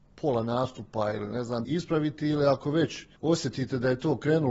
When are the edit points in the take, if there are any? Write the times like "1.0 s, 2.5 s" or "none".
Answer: 1.6 s, 3.2 s

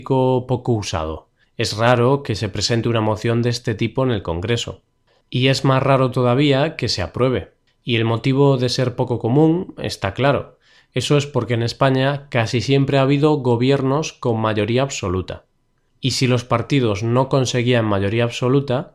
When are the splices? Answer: none

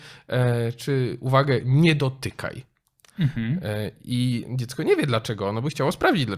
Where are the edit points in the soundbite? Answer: none

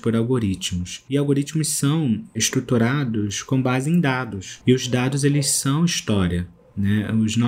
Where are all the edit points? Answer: none

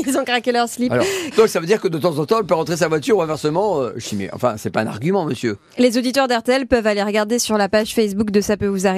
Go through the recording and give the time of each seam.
1.3 s

